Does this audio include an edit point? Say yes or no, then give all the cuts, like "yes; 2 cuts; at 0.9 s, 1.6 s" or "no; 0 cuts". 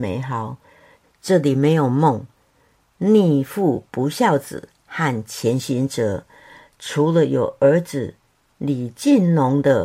yes; 1 cut; at 1.0 s